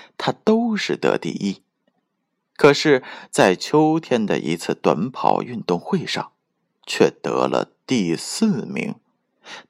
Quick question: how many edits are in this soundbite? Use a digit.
0